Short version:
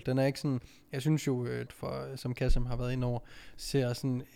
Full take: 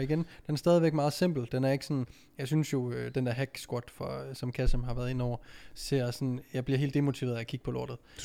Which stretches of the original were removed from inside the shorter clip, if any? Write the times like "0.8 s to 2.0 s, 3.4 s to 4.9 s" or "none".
3.1 s to 3.8 s